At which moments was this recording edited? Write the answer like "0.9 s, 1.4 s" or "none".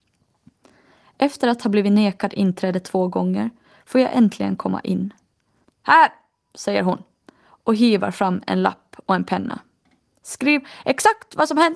5.6 s